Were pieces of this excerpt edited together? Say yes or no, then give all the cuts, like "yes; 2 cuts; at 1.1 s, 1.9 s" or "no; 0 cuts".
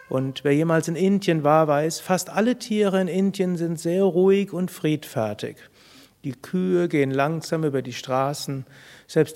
no; 0 cuts